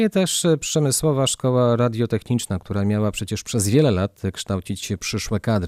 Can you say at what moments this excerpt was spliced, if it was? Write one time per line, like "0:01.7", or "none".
none